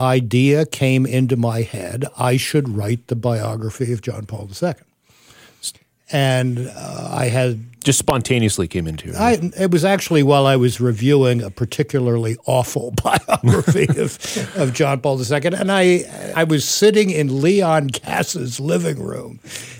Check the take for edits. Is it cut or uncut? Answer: cut